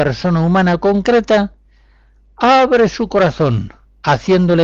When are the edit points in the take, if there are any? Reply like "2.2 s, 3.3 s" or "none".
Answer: none